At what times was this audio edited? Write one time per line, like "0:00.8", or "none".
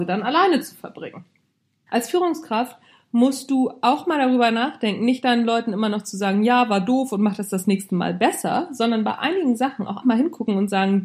0:01.9
0:10.0